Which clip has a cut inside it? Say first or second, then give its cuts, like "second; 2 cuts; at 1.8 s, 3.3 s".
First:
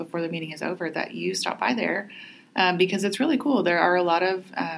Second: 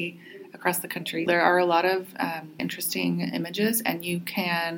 second; 2 cuts; at 1.3 s, 2.6 s